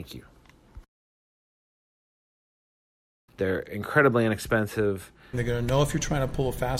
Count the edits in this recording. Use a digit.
2